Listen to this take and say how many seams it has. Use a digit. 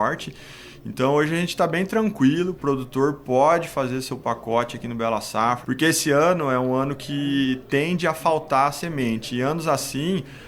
1